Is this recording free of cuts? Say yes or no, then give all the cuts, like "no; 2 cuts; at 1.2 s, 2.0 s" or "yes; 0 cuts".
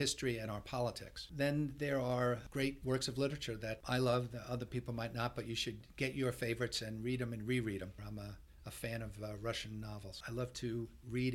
no; 1 cut; at 8.0 s